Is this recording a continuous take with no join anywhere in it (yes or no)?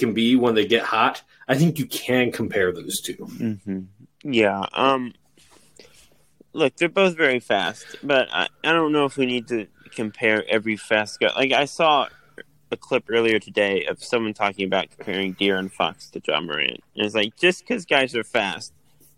yes